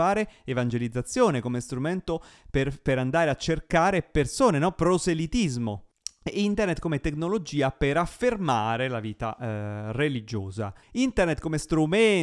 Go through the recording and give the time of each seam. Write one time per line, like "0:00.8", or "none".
0:10.8